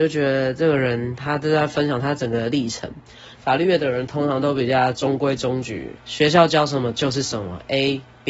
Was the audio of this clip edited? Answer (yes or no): yes